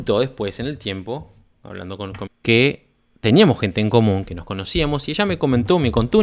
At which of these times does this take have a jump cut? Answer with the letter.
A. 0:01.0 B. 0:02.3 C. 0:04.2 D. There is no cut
B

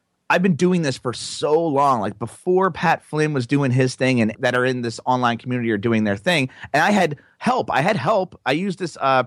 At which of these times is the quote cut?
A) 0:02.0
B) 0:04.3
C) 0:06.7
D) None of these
B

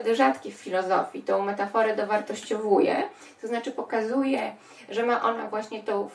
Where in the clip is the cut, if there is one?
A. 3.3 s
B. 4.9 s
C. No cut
C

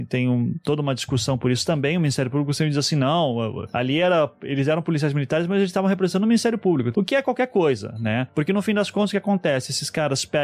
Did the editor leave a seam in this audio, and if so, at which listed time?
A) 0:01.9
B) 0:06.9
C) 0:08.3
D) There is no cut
B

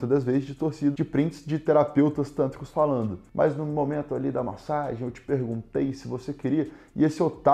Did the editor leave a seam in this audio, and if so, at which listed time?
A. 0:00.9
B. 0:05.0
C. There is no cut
A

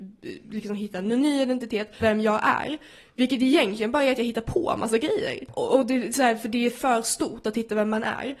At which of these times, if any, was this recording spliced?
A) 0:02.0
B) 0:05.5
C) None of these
A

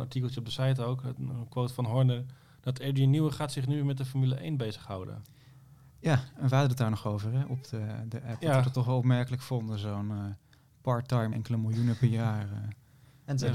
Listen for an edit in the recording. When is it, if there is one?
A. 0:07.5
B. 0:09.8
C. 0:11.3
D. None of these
C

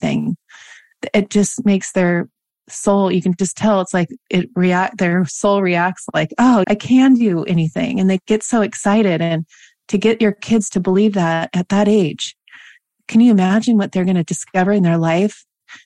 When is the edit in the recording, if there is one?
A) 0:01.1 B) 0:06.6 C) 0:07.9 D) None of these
B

